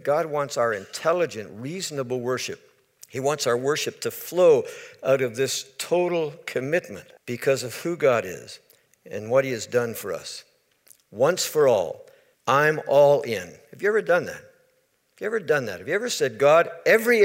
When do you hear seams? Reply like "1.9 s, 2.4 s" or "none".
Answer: 7.2 s, 12.4 s